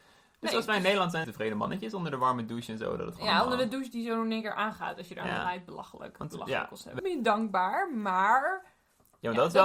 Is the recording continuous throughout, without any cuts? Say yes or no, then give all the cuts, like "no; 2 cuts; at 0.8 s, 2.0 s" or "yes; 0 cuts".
no; 2 cuts; at 1.2 s, 7.0 s